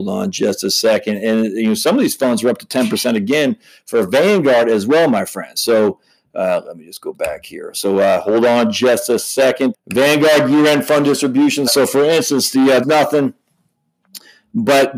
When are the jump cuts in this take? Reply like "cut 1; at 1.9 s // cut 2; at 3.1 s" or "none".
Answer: cut 1; at 9.7 s // cut 2; at 11.7 s // cut 3; at 12.8 s